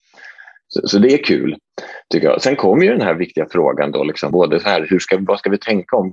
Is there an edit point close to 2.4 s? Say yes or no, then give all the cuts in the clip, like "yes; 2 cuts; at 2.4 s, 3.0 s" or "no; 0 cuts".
no; 1 cut; at 4.3 s